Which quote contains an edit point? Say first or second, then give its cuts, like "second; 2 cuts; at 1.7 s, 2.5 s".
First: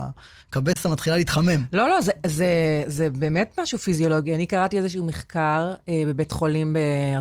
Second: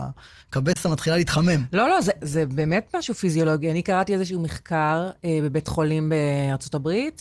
second; 1 cut; at 2.2 s